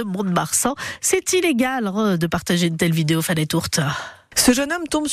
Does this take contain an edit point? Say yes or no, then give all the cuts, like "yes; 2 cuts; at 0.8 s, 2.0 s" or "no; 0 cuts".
no; 0 cuts